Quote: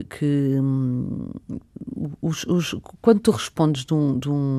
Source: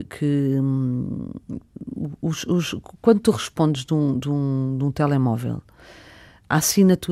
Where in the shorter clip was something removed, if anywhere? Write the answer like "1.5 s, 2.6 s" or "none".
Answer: none